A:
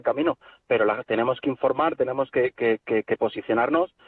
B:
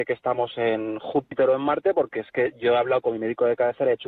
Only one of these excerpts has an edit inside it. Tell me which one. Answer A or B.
A